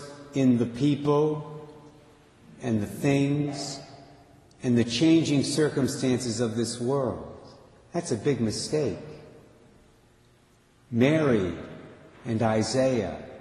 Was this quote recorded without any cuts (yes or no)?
yes